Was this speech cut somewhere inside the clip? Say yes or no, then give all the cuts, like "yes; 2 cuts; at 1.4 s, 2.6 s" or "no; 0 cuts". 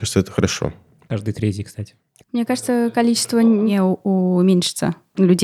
yes; 1 cut; at 2.2 s